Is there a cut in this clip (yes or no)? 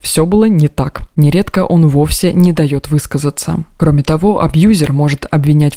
no